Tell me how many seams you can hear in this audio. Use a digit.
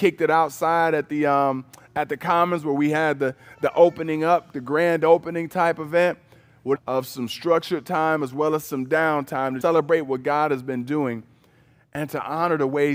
2